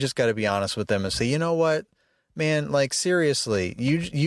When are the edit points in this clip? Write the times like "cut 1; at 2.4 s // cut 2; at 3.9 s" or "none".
none